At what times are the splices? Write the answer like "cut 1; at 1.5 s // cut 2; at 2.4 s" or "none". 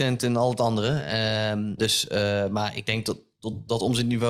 cut 1; at 1.8 s